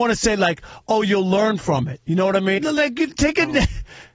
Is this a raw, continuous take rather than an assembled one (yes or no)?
no